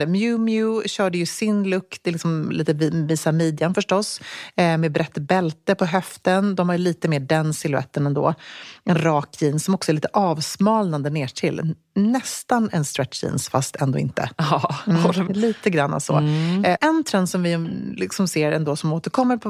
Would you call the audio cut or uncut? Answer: cut